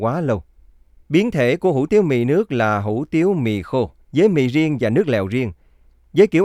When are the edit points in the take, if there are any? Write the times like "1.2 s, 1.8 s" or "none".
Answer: 1.0 s, 4.0 s

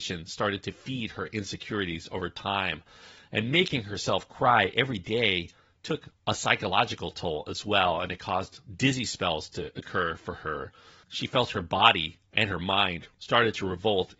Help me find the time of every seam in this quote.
none

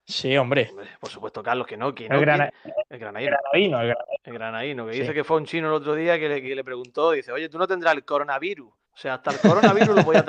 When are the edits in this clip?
8.8 s

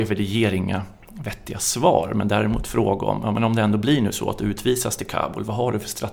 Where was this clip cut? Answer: none

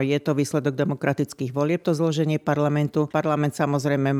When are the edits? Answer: 3.1 s

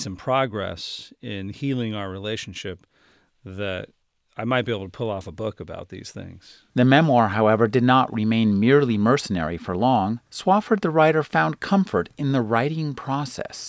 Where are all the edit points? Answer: none

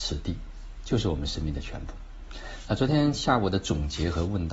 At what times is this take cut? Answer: none

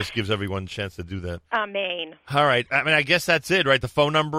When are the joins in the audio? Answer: 1.4 s, 2.7 s

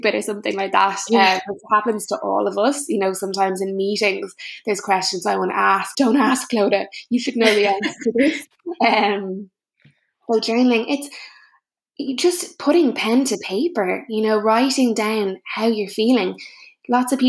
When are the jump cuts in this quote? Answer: 5.9 s

